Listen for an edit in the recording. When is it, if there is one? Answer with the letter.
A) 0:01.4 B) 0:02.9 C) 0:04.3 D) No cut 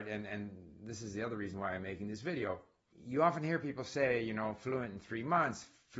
B